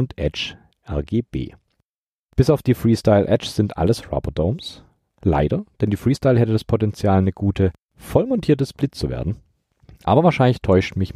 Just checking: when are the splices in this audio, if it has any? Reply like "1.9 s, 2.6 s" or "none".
none